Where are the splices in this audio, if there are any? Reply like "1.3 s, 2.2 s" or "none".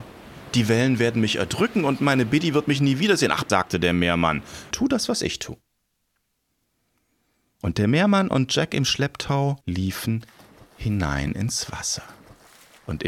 3.5 s, 4.7 s, 9.6 s